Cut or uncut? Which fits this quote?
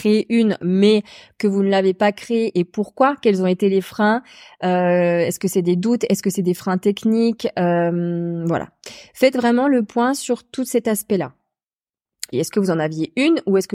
cut